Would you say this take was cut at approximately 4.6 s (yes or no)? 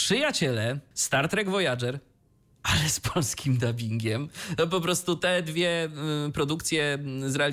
no